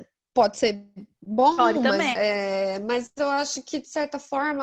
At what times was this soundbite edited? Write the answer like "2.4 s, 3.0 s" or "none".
2.1 s